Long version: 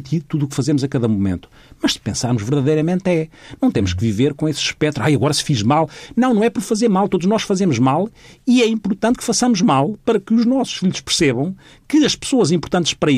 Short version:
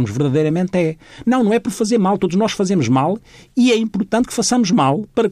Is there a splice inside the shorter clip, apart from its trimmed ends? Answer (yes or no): yes